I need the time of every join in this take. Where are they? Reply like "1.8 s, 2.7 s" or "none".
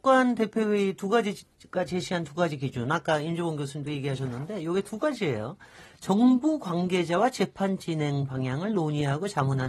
none